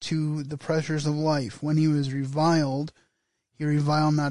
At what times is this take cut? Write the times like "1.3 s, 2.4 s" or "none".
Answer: none